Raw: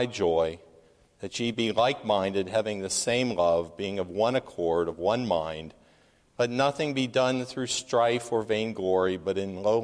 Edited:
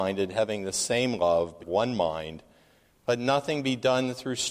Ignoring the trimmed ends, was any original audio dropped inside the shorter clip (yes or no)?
yes